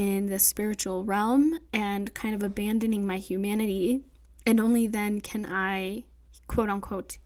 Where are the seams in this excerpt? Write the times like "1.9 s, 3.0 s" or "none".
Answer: none